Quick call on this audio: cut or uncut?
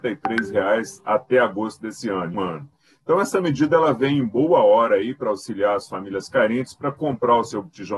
cut